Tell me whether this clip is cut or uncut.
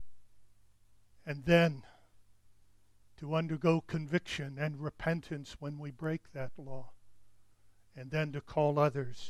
uncut